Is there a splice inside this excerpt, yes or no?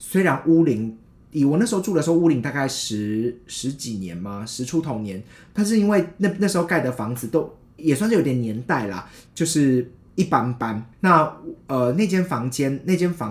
yes